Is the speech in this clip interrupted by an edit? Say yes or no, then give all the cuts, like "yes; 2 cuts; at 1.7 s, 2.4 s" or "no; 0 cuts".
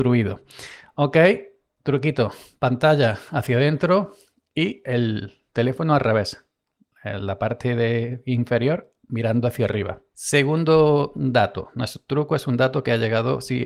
no; 0 cuts